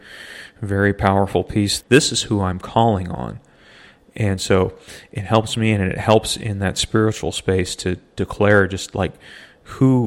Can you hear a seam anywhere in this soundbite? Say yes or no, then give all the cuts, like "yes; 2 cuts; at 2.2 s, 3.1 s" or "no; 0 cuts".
yes; 1 cut; at 1.8 s